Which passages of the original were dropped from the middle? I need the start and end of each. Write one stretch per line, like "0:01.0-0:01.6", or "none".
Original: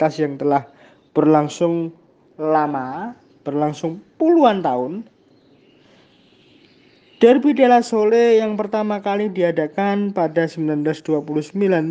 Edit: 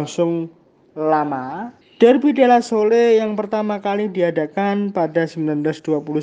0:03.2-0:07.0